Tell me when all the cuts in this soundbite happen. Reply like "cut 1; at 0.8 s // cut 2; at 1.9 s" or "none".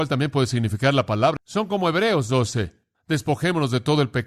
cut 1; at 1.4 s // cut 2; at 2.9 s